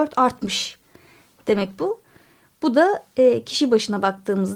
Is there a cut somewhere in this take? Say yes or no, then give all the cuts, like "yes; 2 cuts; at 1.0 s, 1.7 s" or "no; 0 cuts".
no; 0 cuts